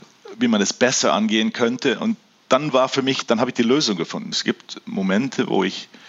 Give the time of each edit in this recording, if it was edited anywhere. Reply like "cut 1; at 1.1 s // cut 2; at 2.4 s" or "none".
cut 1; at 4.3 s